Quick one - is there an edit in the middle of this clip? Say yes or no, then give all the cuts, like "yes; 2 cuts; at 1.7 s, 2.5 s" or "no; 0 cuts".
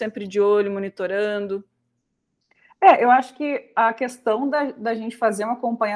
no; 0 cuts